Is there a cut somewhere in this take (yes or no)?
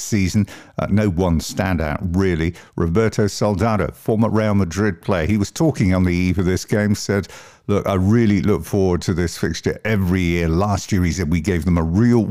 no